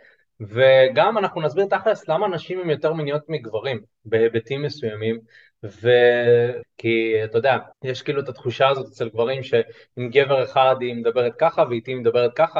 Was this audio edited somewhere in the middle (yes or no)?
yes